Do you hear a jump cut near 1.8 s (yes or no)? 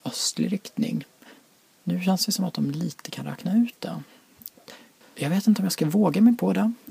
no